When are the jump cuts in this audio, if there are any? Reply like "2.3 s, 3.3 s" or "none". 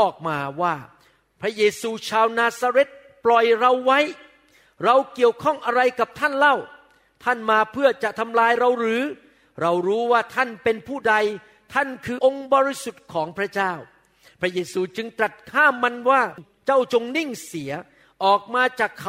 12.2 s